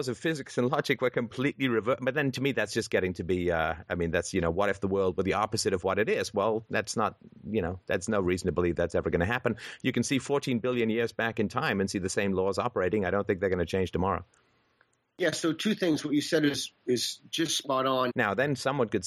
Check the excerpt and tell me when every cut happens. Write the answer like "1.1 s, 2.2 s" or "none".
18.1 s